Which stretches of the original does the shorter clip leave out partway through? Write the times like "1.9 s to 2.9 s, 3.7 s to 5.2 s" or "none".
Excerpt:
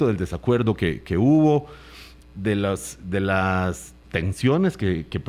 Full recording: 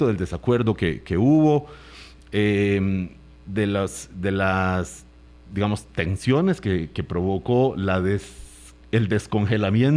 2.2 s to 3.3 s, 5.1 s to 5.9 s